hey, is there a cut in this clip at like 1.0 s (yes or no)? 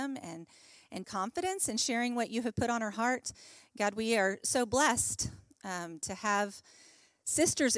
yes